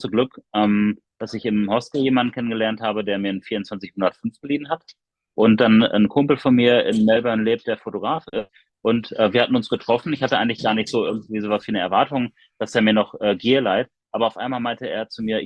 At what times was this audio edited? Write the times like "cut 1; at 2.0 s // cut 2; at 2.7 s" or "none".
none